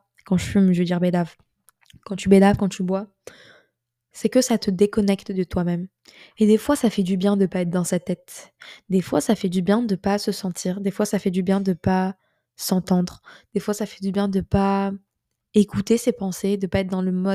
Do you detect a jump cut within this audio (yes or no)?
no